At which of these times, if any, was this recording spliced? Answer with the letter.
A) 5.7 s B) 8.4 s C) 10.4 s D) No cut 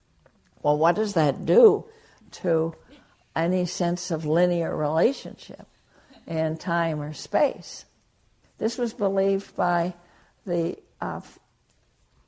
B